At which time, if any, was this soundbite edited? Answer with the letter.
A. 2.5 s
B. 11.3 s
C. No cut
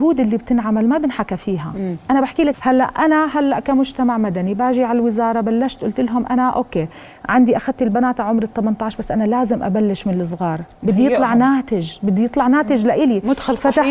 A